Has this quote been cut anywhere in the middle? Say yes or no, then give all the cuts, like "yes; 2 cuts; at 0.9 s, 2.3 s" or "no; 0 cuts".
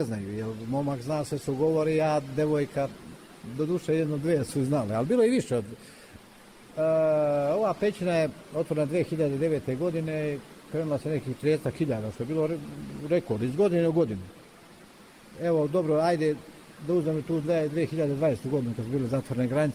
no; 0 cuts